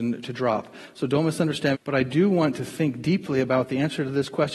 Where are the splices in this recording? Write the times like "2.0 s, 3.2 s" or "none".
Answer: 1.7 s